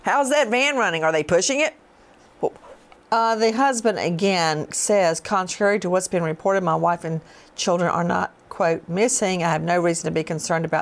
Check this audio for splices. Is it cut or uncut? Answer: cut